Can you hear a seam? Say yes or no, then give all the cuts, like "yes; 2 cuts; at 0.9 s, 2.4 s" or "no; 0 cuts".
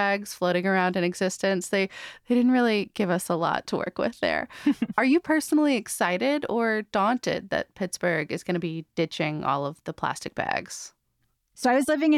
no; 0 cuts